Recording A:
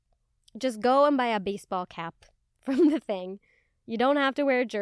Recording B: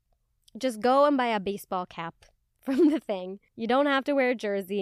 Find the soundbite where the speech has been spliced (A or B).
B